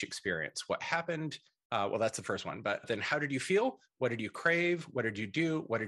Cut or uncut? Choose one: uncut